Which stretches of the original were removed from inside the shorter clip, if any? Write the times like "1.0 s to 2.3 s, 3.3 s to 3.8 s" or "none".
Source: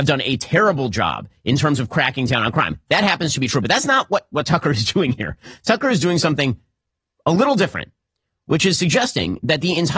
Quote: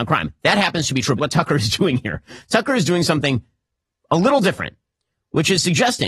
3.6 s to 4.3 s